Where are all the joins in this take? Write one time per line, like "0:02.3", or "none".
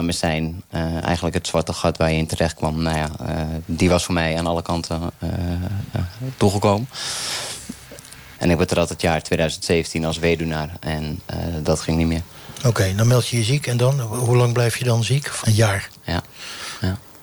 0:08.3
0:15.4

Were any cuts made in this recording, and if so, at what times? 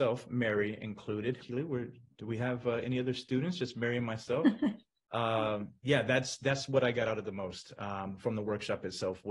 0:01.4

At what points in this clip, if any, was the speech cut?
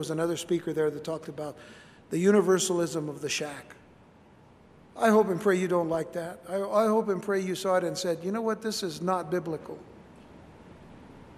none

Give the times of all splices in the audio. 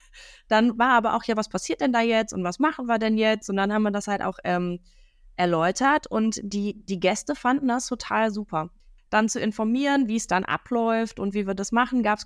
0:09.1

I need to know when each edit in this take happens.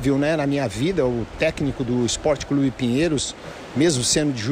none

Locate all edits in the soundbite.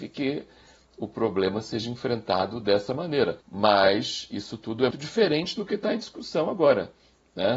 0:03.4
0:04.9

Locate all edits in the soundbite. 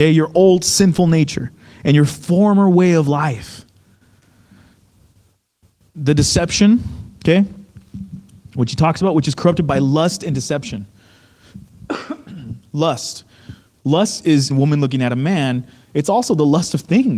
0:14.5

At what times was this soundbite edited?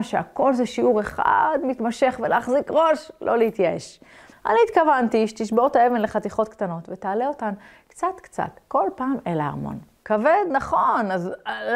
0:04.3
0:10.0

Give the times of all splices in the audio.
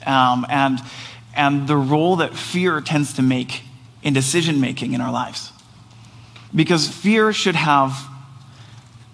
0:06.5

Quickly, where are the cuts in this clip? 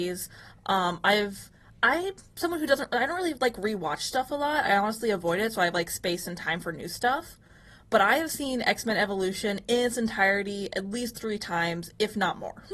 none

